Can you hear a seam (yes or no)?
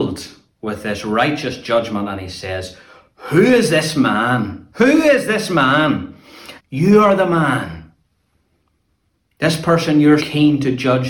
yes